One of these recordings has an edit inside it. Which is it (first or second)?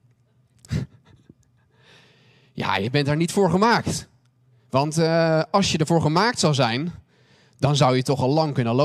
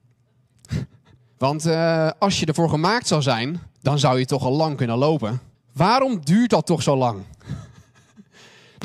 second